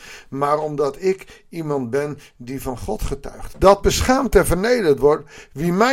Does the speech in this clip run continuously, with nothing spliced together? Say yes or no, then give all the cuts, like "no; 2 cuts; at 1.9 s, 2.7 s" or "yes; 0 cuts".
no; 1 cut; at 3.5 s